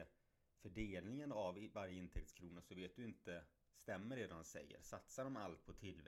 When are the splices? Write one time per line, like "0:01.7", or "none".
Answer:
none